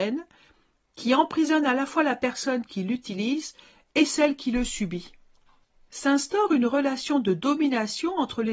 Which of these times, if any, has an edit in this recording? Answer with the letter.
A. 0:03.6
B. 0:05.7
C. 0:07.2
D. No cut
D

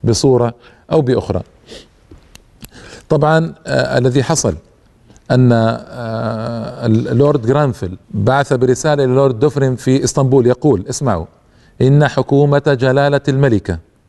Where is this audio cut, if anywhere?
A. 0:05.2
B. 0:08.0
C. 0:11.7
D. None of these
B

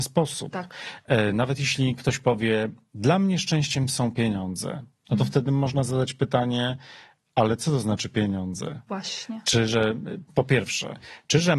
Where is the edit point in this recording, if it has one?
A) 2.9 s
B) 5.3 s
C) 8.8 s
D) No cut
D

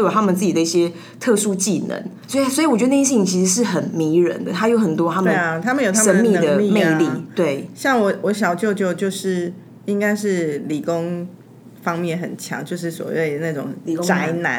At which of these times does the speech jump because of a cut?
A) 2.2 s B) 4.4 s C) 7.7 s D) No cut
A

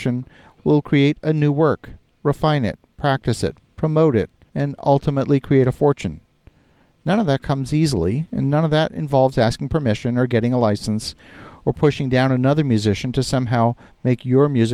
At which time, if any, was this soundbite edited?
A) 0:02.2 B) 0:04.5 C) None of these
B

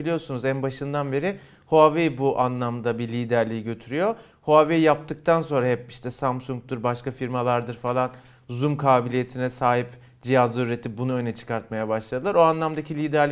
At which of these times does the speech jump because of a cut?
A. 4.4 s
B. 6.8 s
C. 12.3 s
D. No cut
D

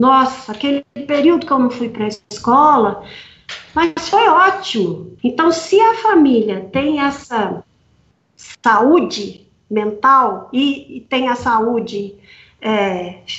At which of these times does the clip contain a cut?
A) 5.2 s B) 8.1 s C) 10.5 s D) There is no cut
A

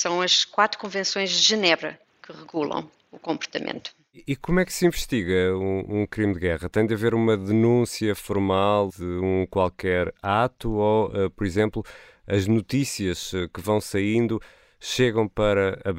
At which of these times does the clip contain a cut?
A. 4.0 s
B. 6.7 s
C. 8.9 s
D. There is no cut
C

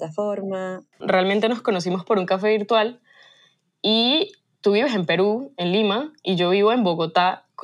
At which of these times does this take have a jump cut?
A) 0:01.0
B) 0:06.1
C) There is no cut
A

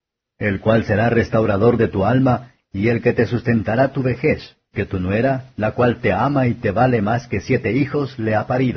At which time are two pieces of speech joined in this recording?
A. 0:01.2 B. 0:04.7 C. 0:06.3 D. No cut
B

